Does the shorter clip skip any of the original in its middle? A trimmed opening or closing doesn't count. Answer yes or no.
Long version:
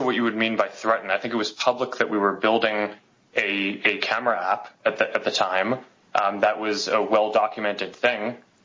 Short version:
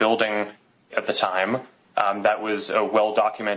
yes